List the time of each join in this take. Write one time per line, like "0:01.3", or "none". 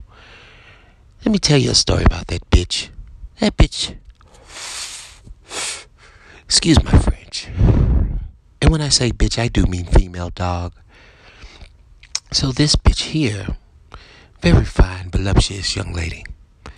0:03.3